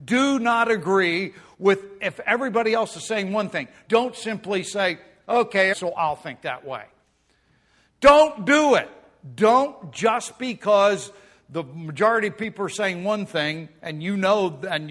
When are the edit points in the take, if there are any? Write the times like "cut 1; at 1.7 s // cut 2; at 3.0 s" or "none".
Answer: cut 1; at 3.8 s // cut 2; at 5.7 s